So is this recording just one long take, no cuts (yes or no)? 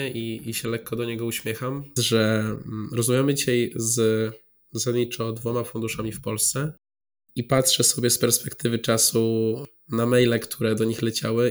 no